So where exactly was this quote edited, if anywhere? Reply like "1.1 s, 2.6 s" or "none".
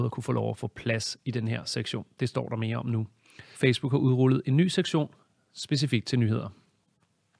3.5 s